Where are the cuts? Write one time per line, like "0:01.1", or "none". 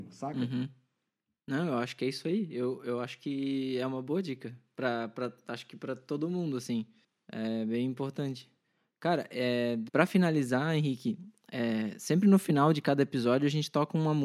none